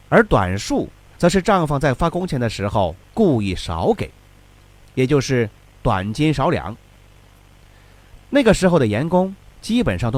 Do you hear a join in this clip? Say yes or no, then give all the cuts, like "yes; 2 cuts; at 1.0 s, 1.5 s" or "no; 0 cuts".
no; 0 cuts